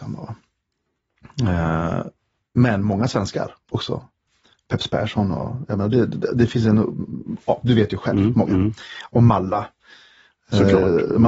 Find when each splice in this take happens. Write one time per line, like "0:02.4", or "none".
none